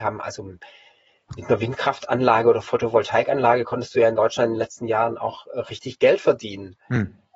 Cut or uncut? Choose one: uncut